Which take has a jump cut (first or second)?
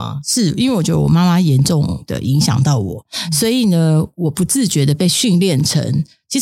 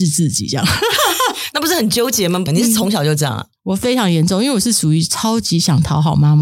second